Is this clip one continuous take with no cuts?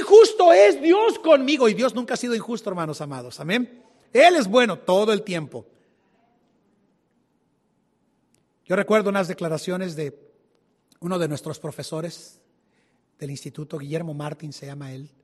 yes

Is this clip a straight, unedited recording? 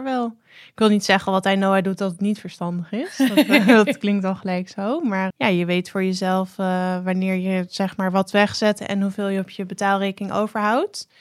no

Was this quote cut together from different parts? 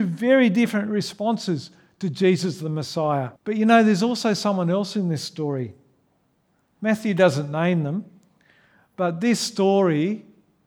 yes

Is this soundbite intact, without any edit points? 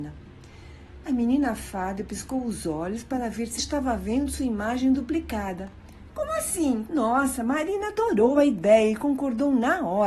no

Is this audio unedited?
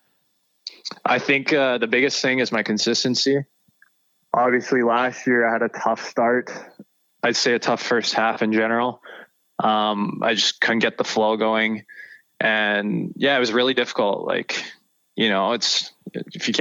yes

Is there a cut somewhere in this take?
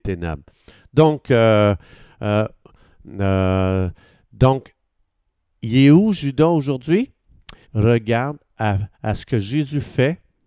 yes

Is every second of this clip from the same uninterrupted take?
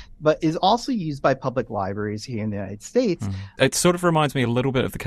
no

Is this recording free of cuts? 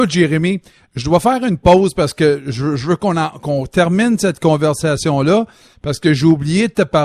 yes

